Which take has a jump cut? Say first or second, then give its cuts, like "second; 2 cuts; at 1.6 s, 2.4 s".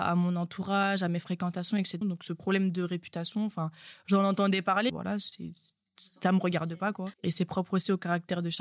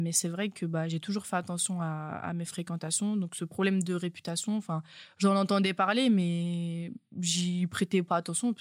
first; 3 cuts; at 2.0 s, 4.9 s, 7.1 s